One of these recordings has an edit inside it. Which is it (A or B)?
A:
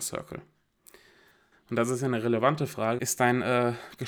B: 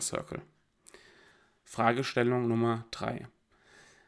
A